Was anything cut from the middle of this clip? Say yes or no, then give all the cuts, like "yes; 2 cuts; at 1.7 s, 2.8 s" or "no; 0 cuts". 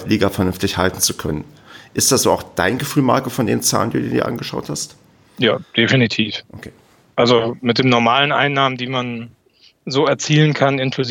no; 0 cuts